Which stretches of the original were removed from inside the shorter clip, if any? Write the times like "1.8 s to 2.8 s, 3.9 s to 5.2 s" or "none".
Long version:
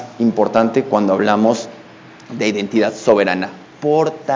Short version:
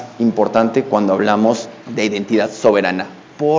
1.8 s to 2.2 s